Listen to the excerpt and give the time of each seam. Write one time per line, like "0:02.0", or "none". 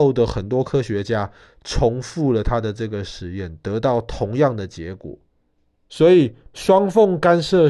0:05.9